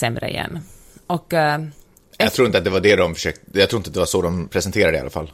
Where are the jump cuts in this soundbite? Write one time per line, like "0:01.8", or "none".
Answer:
none